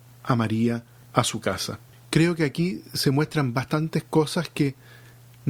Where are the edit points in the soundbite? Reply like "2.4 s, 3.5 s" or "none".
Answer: 1.9 s